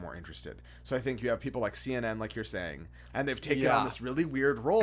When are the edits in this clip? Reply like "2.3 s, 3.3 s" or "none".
3.1 s